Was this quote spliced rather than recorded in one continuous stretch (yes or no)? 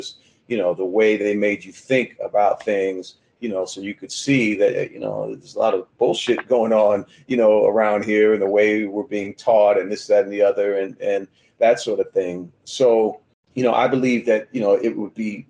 yes